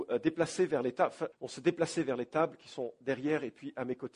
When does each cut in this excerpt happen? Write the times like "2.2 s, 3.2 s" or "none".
1.3 s